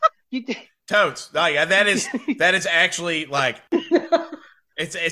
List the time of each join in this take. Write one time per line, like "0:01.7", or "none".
none